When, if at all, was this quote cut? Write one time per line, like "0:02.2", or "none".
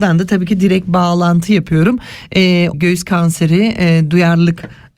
0:02.7